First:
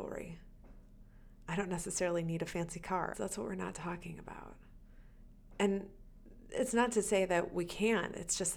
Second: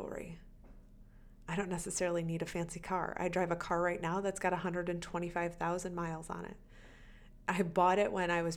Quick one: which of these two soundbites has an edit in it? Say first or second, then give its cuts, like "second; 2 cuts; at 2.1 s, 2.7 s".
first; 1 cut; at 3.1 s